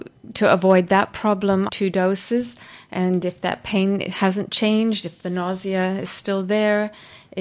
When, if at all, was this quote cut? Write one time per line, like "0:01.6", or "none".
0:01.7